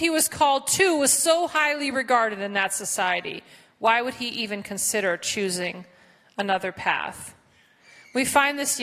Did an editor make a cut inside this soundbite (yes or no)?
no